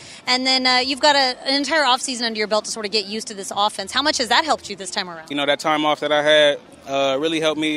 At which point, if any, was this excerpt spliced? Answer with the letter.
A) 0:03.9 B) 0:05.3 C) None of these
B